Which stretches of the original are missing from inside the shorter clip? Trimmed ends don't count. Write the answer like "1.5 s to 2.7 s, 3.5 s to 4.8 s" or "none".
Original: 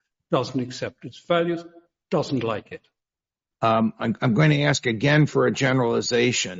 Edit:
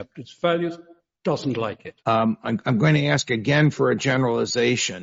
2.9 s to 3.6 s